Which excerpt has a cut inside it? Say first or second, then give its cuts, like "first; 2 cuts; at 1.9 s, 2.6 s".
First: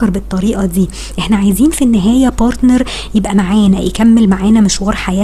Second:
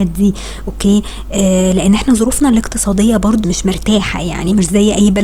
second; 1 cut; at 3.4 s